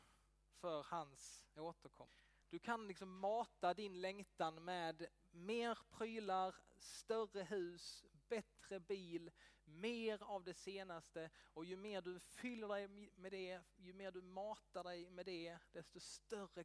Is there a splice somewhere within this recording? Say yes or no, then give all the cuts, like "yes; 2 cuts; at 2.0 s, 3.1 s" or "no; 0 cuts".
yes; 1 cut; at 2.4 s